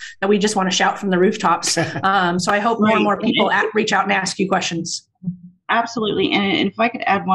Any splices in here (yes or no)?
no